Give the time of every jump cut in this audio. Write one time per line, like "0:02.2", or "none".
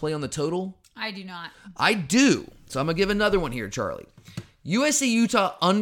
none

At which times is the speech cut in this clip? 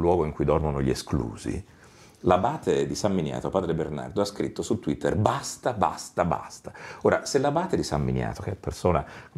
none

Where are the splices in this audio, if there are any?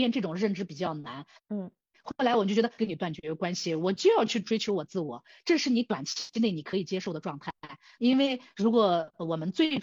0:01.4
0:02.8
0:08.0

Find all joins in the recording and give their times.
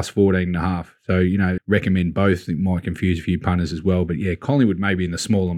0:01.6

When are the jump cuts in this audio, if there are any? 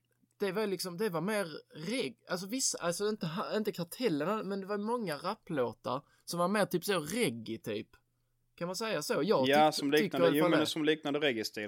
none

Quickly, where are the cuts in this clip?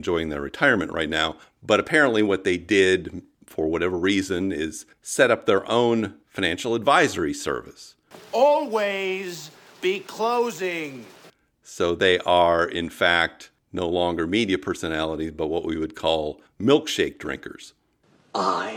none

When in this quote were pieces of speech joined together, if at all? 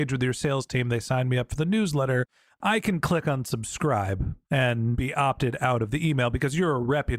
none

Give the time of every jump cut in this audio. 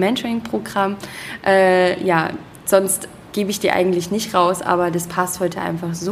none

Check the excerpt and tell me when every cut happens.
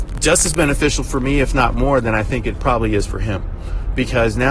none

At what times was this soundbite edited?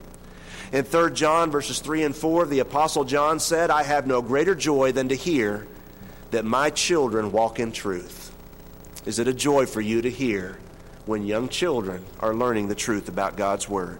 none

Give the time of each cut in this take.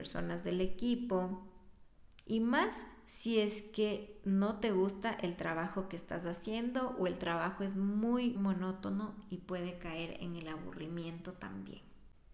0:02.2
0:08.3

